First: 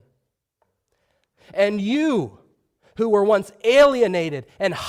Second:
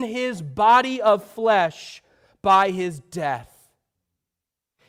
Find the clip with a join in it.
first; 1 cut; at 1.3 s

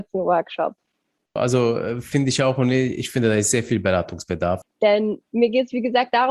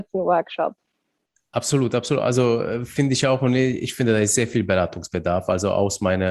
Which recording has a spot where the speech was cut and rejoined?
first; 2 cuts; at 1.4 s, 4.6 s

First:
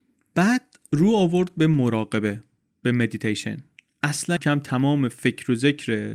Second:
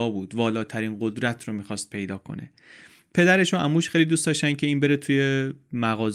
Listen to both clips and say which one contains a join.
first; 1 cut; at 4.4 s

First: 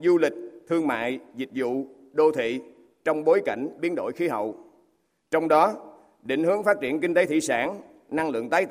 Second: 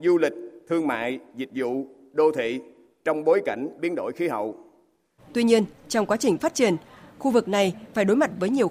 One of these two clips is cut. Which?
second; 1 cut; at 5.2 s

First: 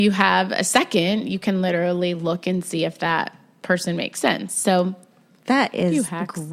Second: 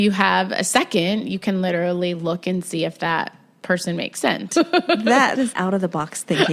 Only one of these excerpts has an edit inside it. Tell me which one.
second; 2 cuts; at 4.5 s, 5.5 s

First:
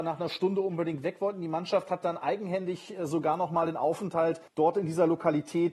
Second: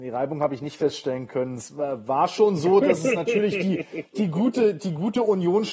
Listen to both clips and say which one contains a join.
first; 1 cut; at 4.5 s

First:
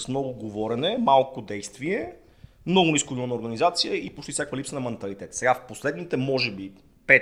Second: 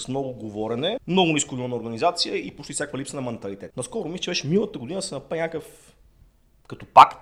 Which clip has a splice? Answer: second; 2 cuts; at 1.0 s, 3.7 s

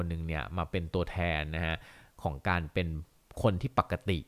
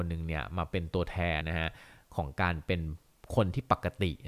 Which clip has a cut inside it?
second; 1 cut; at 1.4 s

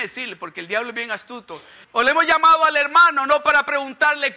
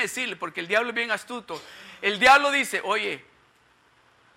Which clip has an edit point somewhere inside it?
first; 1 cut; at 1.8 s

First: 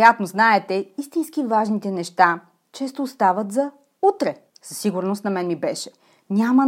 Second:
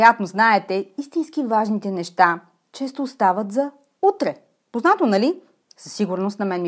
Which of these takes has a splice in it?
first; 1 cut; at 4.5 s

